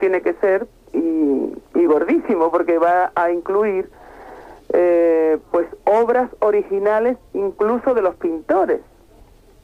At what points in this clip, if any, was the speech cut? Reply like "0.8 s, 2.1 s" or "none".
none